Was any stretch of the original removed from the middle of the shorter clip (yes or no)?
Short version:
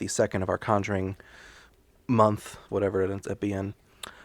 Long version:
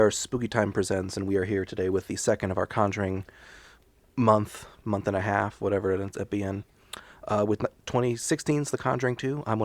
yes